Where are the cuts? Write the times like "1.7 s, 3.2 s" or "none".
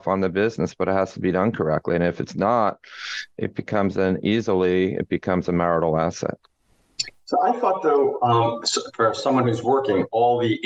none